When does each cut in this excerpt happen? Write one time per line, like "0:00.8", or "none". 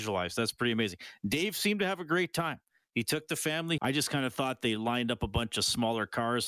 0:03.8